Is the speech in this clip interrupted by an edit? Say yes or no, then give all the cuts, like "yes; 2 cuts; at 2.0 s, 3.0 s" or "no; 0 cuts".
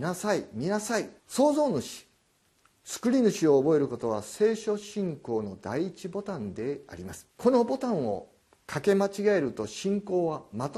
yes; 2 cuts; at 1.2 s, 7.3 s